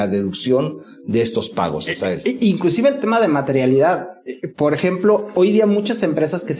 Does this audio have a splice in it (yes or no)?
no